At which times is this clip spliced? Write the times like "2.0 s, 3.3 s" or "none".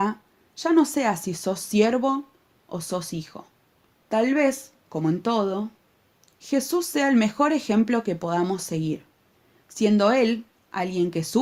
4.0 s